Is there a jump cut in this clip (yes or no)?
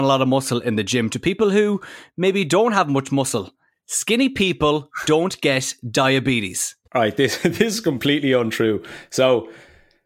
yes